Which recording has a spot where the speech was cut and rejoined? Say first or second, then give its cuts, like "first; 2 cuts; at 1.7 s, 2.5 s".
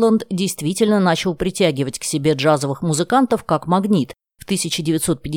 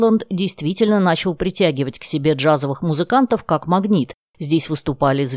first; 1 cut; at 4.3 s